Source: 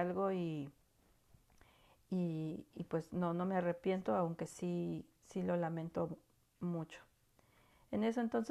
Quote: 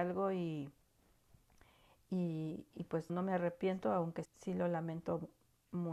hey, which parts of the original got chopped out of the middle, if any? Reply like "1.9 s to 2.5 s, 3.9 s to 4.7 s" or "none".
3.1 s to 3.3 s, 4.5 s to 5.1 s